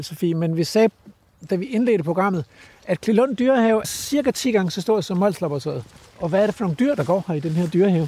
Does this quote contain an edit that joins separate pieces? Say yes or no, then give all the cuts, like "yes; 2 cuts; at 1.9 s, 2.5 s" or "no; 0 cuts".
yes; 2 cuts; at 3.8 s, 6.1 s